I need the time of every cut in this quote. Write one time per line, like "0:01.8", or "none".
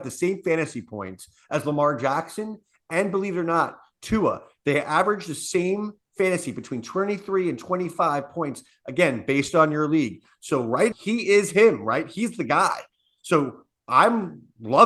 0:10.9